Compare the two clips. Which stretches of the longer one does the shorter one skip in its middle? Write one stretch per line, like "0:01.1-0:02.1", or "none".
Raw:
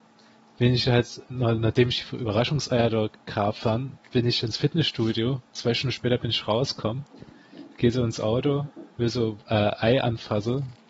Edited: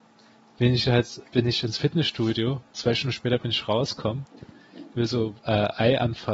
0:01.2-0:04.0
0:07.7-0:08.9